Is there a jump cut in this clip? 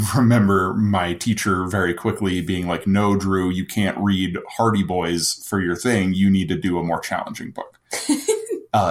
no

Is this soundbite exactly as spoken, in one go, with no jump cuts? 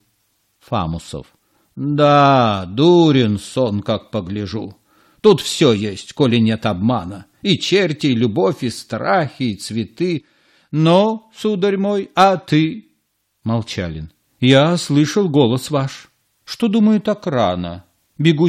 no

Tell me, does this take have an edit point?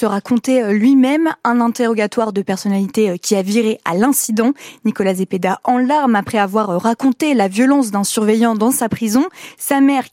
no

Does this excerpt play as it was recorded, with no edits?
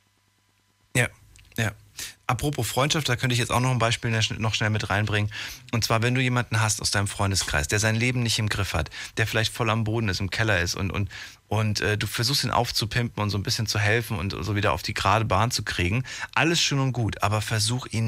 yes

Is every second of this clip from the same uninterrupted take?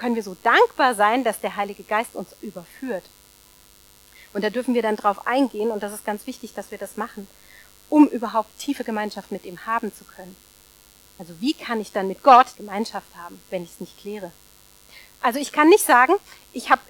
no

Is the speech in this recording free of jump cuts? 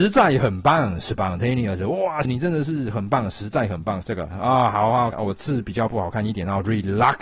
no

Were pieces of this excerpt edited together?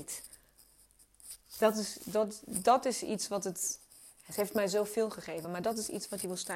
no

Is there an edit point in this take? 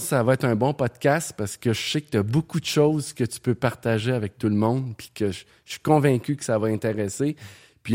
no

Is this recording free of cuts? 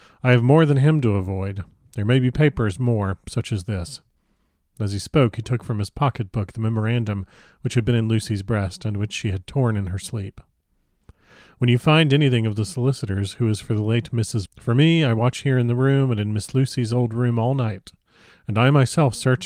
no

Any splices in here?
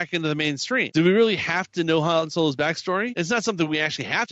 yes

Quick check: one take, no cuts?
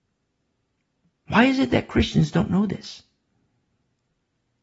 no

